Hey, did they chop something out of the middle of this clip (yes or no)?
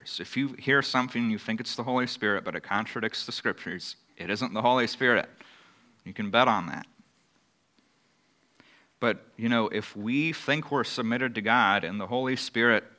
no